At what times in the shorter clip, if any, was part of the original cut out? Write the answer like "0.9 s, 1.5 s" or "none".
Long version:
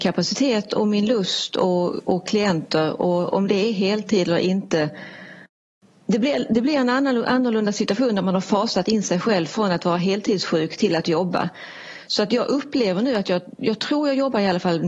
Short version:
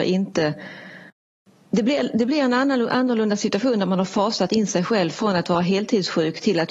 none